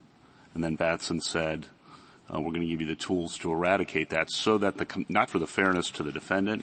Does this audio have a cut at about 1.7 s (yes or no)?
no